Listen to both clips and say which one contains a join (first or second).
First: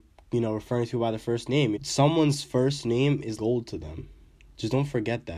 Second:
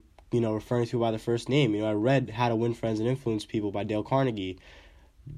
first